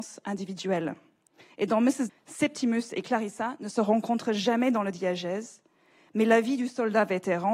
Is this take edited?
yes; 1 cut; at 2.1 s

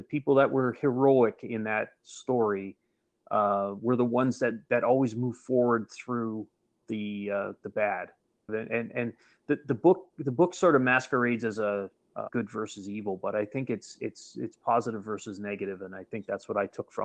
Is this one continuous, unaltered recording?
no; 2 cuts; at 8.5 s, 12.3 s

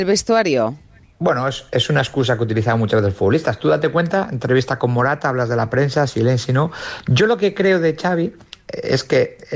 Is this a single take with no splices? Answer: yes; 0 cuts

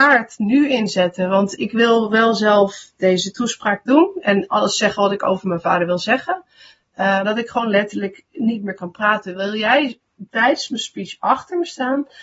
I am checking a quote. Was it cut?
yes; 1 cut; at 7.2 s

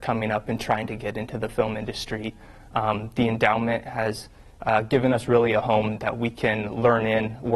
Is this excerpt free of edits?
yes; 0 cuts

